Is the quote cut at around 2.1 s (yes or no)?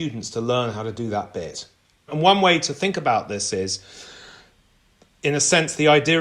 yes